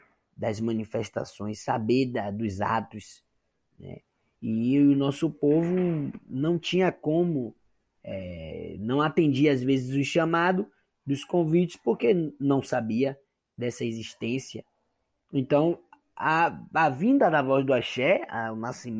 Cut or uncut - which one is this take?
uncut